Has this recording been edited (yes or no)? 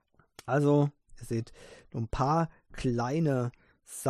no